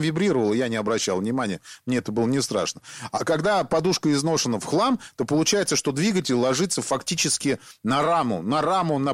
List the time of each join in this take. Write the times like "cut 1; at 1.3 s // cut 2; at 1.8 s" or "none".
none